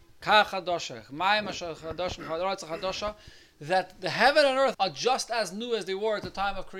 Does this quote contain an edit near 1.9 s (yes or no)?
no